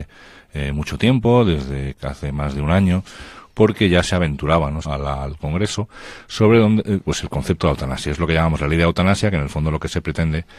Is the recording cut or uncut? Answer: cut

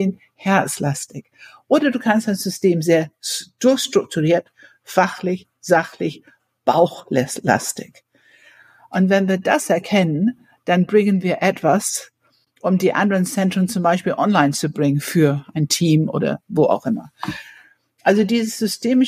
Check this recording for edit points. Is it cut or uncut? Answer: uncut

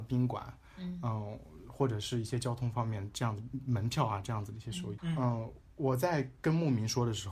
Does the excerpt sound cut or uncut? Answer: cut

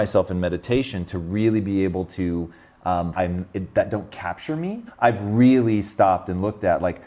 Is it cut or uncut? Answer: cut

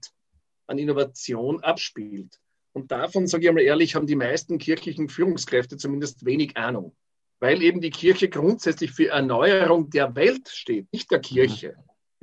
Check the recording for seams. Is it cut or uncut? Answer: cut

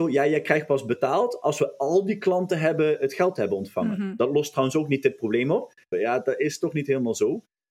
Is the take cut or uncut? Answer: cut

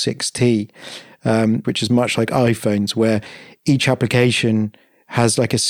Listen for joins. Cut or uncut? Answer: cut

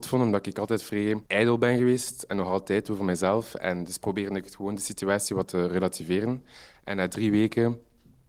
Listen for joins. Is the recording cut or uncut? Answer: cut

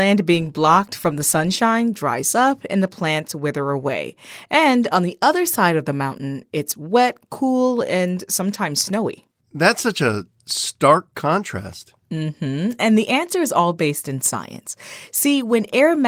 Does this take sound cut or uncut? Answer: uncut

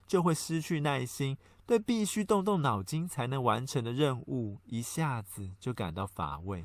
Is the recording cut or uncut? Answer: uncut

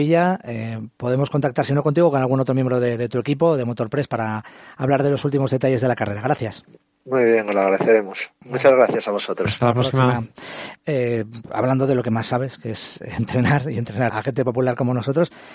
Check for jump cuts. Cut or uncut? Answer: cut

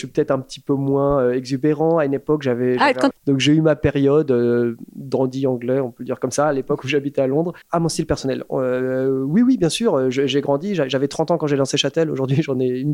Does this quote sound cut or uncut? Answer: cut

